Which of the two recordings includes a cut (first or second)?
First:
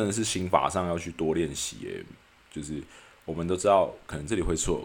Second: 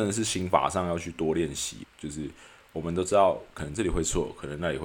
second